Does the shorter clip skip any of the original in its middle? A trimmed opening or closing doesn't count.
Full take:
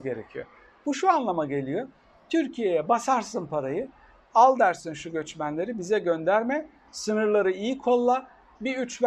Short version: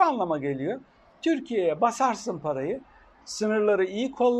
yes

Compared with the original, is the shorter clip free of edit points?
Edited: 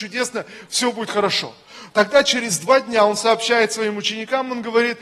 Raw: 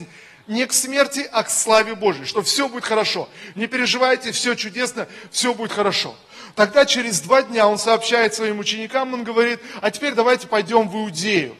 yes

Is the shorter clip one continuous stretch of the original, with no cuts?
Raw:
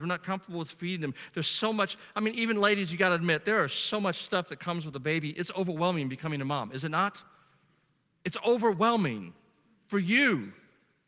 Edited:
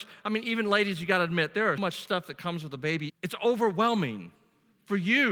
no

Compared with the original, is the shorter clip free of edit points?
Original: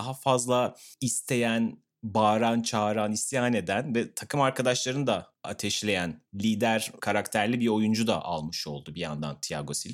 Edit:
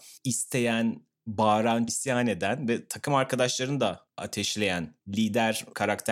no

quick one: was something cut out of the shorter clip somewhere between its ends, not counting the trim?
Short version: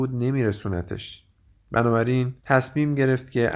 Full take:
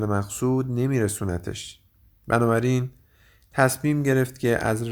yes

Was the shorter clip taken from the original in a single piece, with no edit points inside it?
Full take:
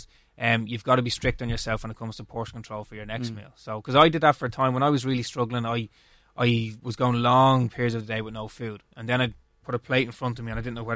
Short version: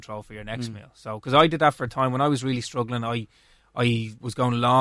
yes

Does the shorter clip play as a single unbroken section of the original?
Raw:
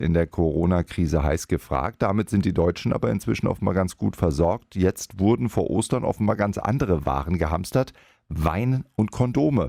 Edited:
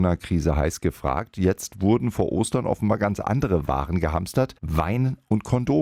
no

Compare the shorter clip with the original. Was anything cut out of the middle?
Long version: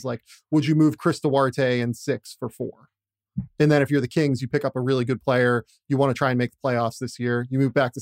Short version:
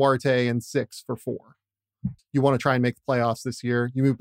yes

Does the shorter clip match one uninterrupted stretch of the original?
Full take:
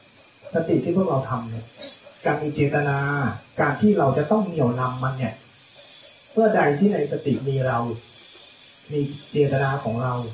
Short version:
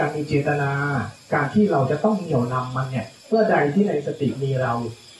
no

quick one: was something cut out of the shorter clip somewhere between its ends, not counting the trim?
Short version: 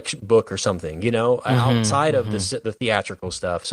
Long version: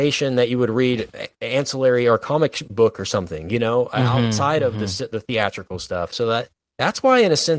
no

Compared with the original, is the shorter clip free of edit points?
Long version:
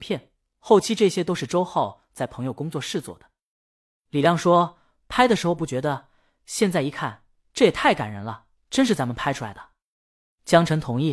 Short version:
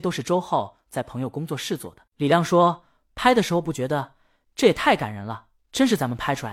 no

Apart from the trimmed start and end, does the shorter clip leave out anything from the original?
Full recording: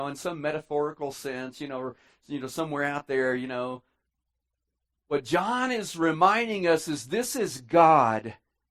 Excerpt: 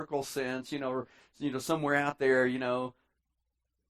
no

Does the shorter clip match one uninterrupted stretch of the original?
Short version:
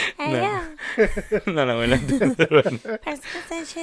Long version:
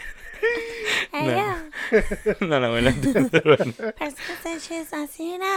yes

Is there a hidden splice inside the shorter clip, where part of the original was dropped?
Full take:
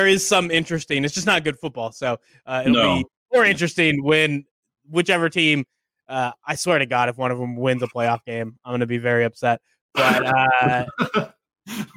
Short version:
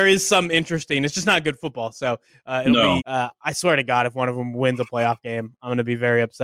yes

